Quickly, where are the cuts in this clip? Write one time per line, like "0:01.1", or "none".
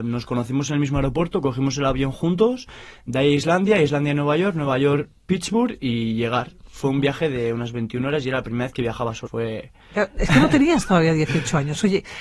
0:09.3